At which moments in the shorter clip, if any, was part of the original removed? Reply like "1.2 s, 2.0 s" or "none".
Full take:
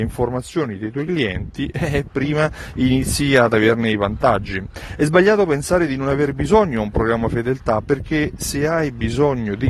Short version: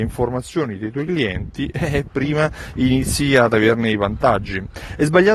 none